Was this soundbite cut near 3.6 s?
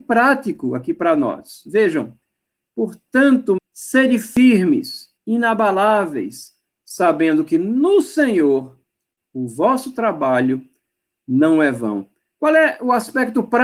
yes; 3 cuts; at 3.6 s, 5.2 s, 6.7 s

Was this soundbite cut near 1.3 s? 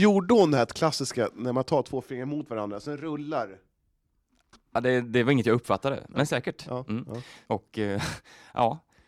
no; 1 cut; at 7.5 s

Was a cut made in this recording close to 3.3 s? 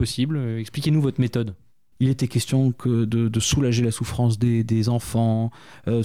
no; 1 cut; at 1.9 s

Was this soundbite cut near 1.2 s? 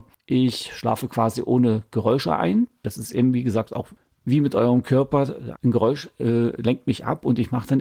no; 2 cuts; at 2.8 s, 5.6 s

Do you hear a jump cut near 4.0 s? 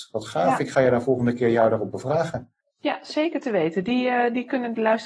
no; 1 cut; at 2.6 s

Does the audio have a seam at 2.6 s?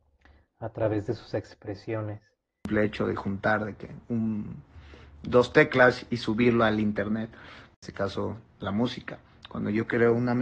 no; 1 cut; at 6.1 s

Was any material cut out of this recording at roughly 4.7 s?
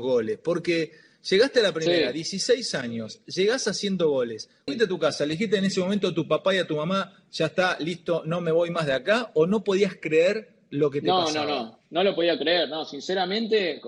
yes; 1 cut; at 4.7 s

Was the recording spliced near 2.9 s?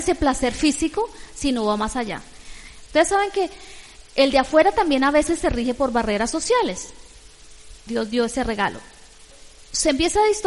yes; 2 cuts; at 2.9 s, 7.9 s

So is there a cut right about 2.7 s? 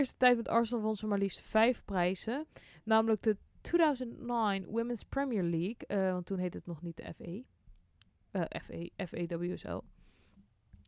no; 0 cuts

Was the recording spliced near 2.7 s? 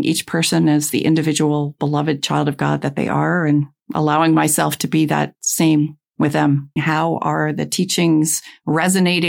no; 1 cut; at 6.8 s

